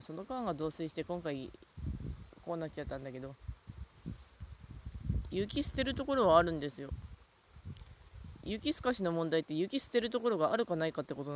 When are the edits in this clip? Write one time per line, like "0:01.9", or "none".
none